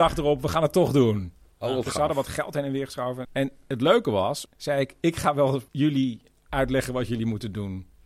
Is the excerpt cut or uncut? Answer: cut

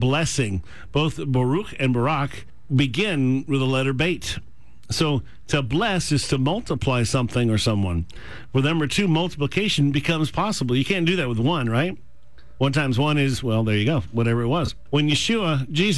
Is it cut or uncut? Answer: uncut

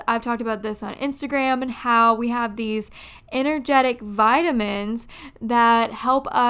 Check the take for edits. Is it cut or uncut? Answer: uncut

